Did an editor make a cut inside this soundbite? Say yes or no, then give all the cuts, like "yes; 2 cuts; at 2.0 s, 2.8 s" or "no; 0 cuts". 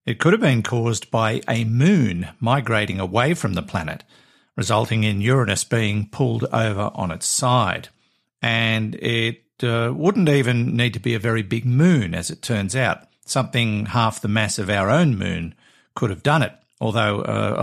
no; 0 cuts